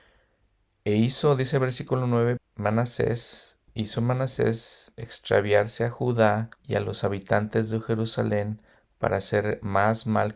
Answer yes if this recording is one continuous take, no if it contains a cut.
no